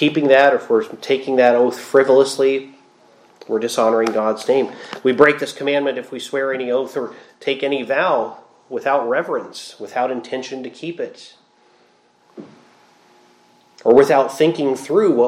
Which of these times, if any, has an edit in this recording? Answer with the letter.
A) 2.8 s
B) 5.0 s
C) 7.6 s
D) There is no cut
D